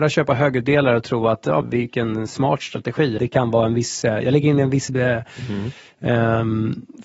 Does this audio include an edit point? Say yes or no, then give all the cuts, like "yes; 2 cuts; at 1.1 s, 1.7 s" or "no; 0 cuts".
yes; 2 cuts; at 1.6 s, 3.2 s